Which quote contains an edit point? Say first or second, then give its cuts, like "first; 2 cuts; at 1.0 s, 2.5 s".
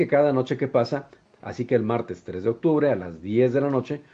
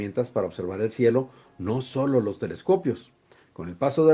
first; 1 cut; at 1.2 s